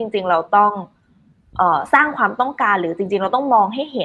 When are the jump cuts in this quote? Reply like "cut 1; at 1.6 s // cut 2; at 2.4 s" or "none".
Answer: none